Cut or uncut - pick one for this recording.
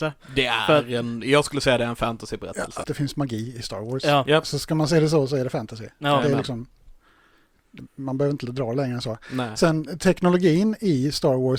cut